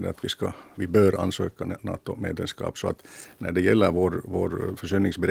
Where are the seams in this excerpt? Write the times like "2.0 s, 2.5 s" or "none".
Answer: none